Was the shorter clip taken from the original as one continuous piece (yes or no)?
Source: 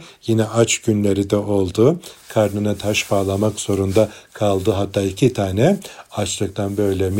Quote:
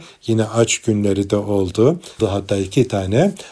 no